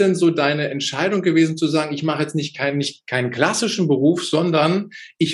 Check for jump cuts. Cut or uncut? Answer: uncut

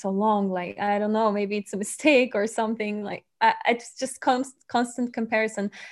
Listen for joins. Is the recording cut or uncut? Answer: uncut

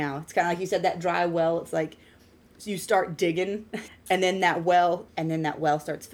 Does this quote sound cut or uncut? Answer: cut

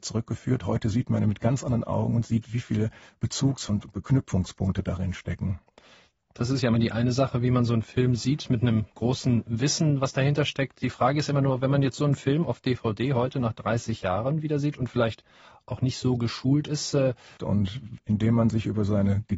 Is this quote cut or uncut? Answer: cut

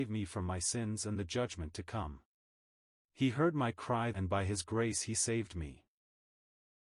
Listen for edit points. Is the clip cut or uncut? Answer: cut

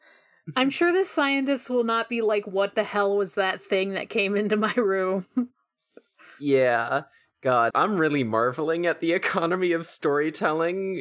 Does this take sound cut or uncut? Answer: cut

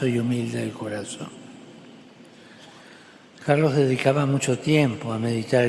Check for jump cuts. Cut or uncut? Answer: uncut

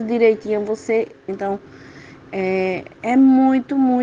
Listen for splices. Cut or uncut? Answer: cut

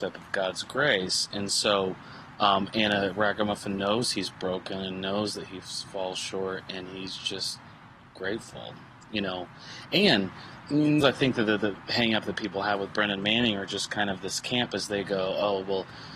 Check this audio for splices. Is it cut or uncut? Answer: cut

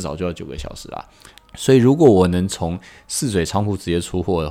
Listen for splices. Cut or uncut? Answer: cut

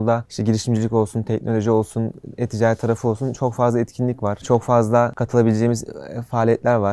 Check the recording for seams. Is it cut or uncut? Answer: uncut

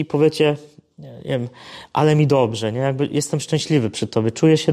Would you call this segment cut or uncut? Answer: uncut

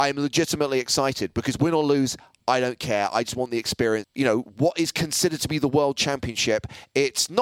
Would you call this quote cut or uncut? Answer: cut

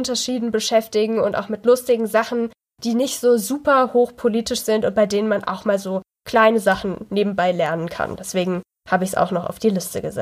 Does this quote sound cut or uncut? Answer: uncut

